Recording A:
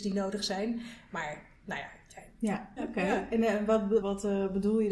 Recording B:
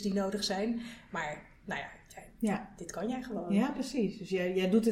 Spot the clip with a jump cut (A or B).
A